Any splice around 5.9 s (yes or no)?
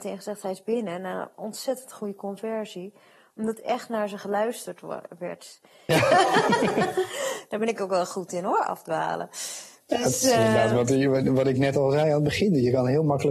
yes